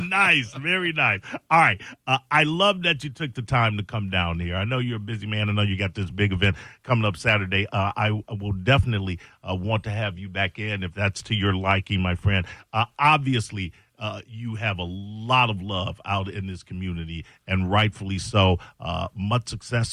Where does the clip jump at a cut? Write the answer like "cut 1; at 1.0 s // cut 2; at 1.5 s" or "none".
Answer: none